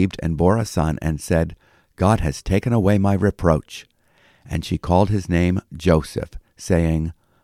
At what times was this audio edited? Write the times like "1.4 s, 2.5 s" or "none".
none